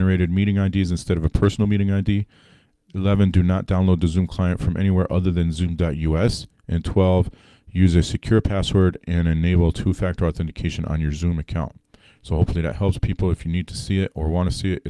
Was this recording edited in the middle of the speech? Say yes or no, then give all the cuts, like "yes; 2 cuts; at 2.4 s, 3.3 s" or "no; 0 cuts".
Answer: no; 0 cuts